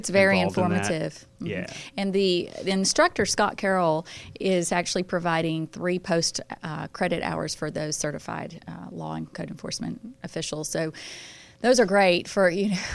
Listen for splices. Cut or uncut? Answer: uncut